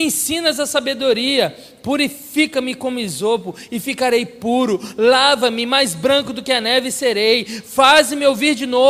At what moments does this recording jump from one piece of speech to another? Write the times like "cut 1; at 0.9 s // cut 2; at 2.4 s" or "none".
none